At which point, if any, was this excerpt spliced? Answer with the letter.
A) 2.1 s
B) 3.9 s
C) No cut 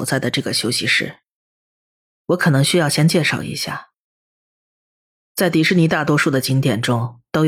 A